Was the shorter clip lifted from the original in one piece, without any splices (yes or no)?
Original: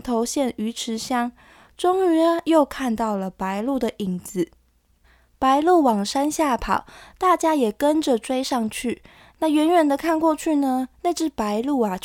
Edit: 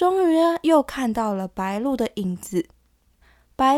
yes